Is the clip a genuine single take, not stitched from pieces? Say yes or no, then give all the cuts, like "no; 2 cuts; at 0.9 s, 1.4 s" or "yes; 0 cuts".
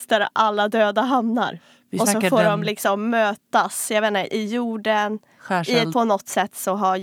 no; 2 cuts; at 4.3 s, 5.9 s